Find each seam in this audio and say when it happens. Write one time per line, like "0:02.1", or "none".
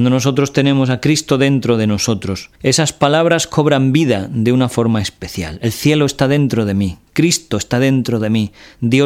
0:02.6